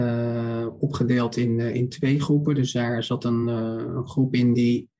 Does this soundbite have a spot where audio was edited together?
no; 0 cuts

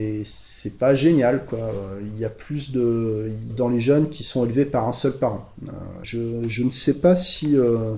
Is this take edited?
yes; 2 cuts; at 3.5 s, 6.0 s

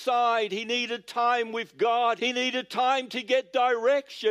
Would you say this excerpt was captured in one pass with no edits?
no; 1 cut; at 2.2 s

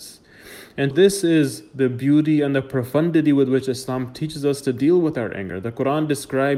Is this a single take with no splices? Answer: no; 1 cut; at 0.9 s

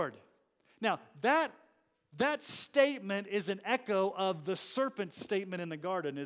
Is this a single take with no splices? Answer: yes; 0 cuts

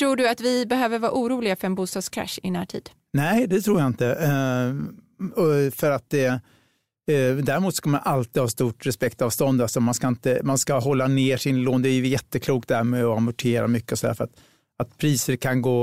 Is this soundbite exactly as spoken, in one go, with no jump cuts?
yes; 0 cuts

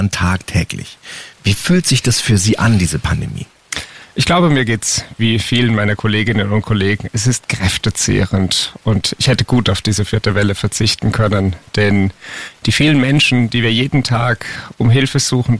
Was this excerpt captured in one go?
no; 1 cut; at 1.3 s

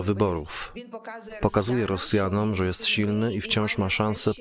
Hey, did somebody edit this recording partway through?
no; 0 cuts

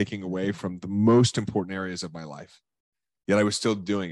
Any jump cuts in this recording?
no; 0 cuts

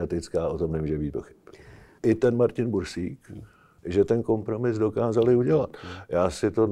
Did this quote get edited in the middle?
yes; 2 cuts; at 2.0 s, 3.8 s

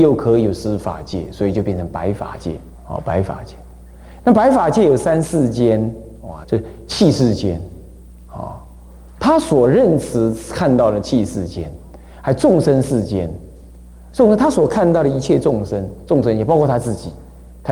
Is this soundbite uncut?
no; 2 cuts; at 2.7 s, 6.4 s

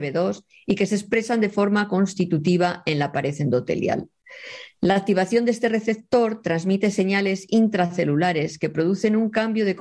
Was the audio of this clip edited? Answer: no; 0 cuts

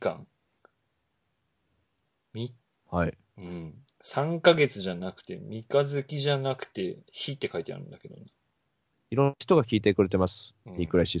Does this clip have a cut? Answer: yes; 1 cut; at 8.9 s

